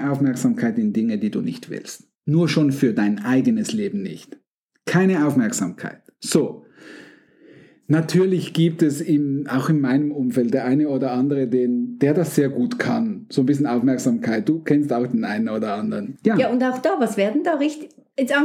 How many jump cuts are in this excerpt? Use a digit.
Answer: 2